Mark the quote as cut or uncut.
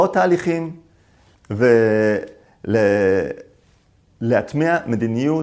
cut